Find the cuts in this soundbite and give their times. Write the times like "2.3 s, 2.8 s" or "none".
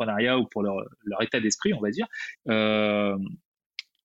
2.3 s